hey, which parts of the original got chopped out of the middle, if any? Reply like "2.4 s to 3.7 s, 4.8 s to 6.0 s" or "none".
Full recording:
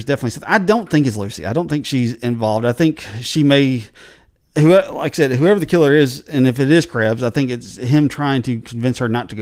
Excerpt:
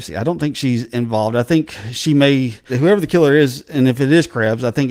4.0 s to 5.3 s